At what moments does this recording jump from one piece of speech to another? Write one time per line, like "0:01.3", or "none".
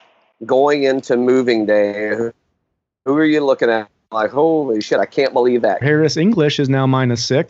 0:05.8